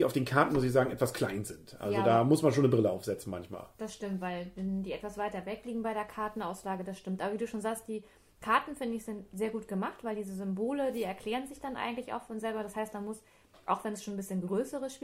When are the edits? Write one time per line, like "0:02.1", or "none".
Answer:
none